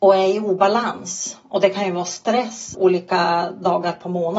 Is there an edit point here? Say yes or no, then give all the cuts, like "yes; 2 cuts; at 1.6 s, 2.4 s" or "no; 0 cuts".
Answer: yes; 1 cut; at 2.7 s